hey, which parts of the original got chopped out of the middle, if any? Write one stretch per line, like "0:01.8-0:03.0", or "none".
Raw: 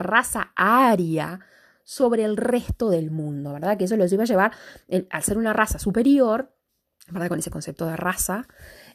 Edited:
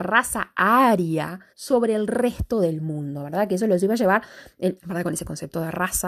0:01.5-0:01.8
0:05.1-0:07.0